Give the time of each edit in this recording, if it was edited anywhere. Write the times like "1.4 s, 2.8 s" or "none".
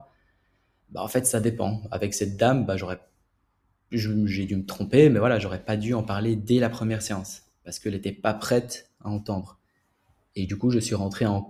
none